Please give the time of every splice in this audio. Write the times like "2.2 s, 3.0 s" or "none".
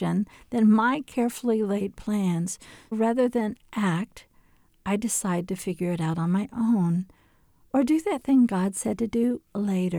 2.9 s